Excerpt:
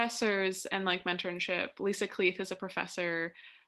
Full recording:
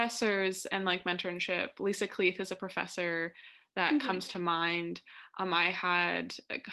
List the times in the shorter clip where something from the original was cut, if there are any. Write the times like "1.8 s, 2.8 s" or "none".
none